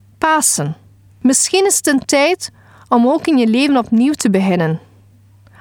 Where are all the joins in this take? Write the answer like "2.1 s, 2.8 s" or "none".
1.1 s